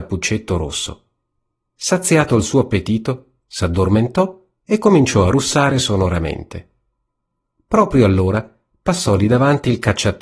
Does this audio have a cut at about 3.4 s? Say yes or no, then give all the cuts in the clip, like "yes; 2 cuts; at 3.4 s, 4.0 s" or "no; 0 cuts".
yes; 1 cut; at 3.4 s